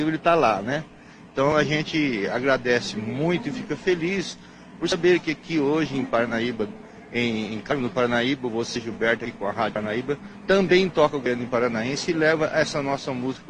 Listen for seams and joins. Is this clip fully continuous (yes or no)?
yes